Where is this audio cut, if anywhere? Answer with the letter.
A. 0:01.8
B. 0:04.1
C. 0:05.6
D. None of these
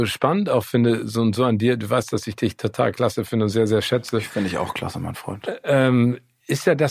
D